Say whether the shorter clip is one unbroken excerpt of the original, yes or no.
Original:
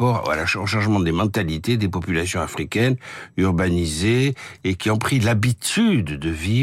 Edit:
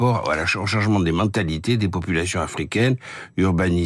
yes